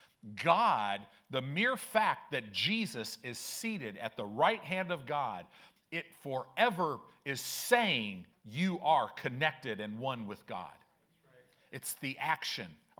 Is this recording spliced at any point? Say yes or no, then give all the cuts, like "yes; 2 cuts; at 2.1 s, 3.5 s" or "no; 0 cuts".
yes; 2 cuts; at 5.8 s, 8.3 s